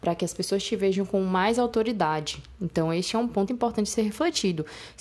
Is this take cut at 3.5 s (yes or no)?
yes